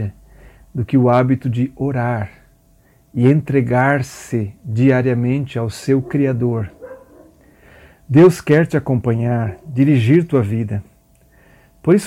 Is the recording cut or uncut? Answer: uncut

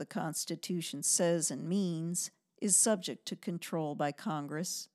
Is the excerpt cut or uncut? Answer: uncut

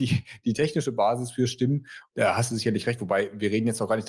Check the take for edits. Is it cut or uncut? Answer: cut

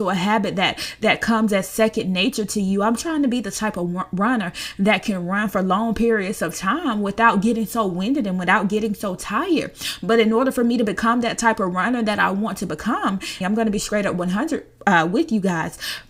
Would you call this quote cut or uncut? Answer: cut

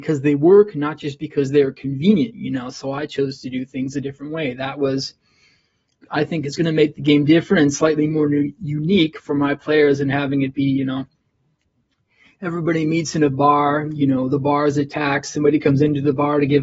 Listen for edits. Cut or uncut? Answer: uncut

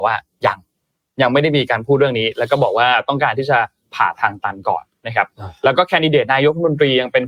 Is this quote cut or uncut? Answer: uncut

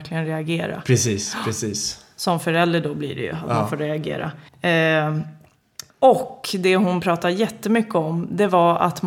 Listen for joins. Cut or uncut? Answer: cut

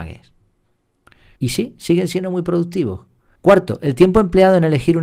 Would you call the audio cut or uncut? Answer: cut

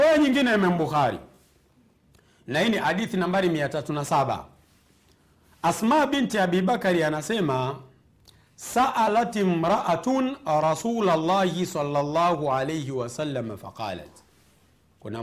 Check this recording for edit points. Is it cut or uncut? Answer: uncut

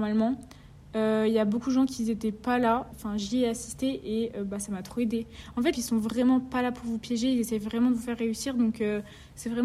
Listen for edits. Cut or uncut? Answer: cut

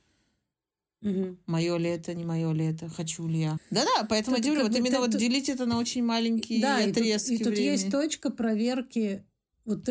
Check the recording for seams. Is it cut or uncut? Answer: cut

